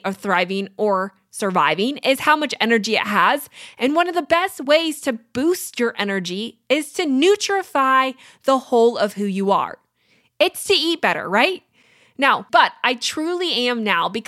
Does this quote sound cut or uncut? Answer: cut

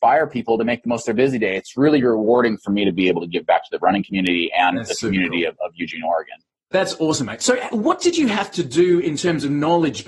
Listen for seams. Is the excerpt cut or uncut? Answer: uncut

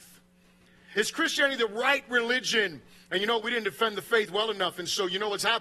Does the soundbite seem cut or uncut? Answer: cut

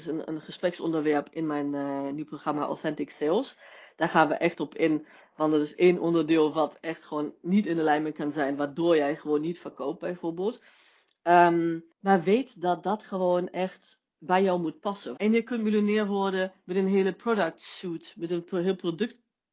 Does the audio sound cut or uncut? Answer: cut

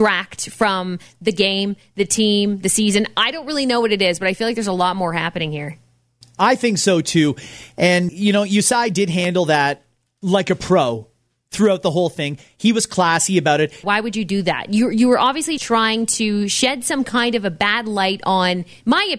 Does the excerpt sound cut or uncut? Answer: cut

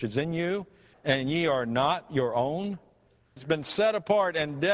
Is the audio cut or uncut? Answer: cut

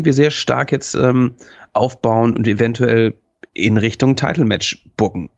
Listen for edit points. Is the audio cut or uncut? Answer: uncut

